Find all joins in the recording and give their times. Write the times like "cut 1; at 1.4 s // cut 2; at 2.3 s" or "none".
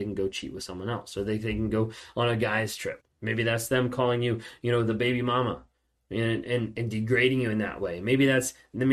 cut 1; at 3.0 s